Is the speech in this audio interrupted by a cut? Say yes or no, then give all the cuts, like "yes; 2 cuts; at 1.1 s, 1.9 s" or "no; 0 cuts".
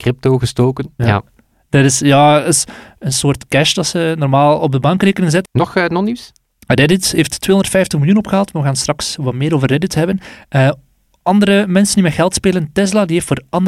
yes; 2 cuts; at 1.0 s, 5.5 s